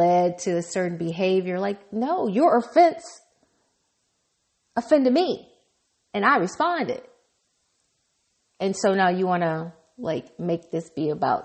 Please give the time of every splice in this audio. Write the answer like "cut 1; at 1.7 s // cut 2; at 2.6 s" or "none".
none